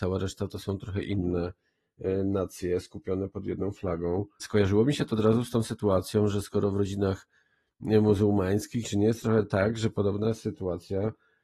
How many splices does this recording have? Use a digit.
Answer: 2